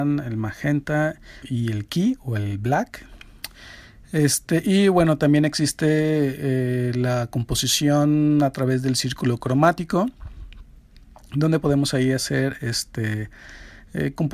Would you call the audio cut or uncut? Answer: cut